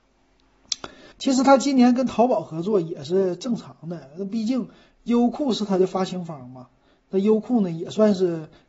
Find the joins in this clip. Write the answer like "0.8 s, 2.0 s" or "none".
1.1 s